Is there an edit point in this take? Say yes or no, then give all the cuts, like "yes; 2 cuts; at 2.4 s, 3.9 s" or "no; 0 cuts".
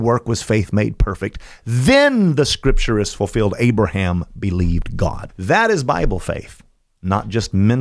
yes; 1 cut; at 5.3 s